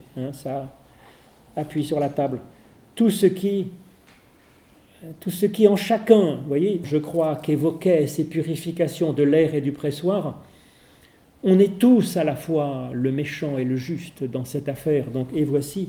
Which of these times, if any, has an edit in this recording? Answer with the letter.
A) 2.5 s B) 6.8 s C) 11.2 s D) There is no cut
B